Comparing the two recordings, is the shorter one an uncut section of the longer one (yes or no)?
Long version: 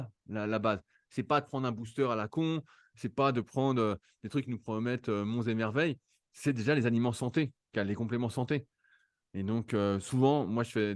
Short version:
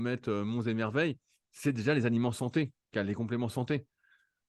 yes